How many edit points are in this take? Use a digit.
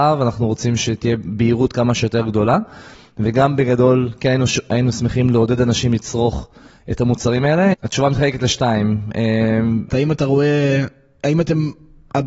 2